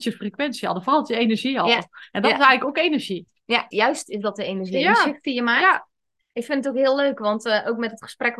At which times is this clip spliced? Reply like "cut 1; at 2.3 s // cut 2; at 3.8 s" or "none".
cut 1; at 3.7 s